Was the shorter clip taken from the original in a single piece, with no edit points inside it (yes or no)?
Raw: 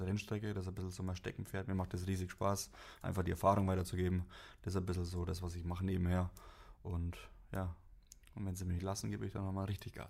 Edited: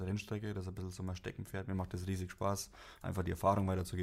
yes